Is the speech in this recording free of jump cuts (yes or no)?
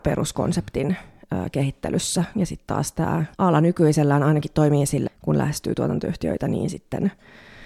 no